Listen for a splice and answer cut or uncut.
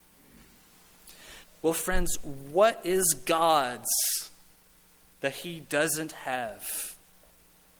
cut